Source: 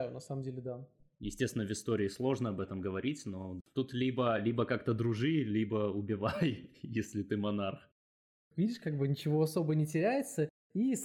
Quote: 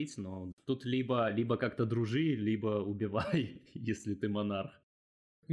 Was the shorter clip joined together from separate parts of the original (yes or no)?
no